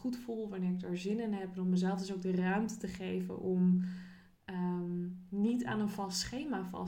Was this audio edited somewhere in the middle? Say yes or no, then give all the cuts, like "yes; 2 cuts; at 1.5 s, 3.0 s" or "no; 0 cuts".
no; 0 cuts